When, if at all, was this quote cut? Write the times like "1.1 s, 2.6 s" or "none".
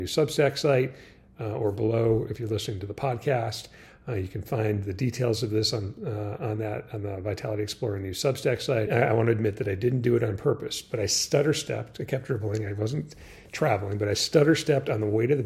8.9 s